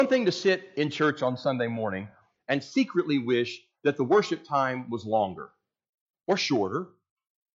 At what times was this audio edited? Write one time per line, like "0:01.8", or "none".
none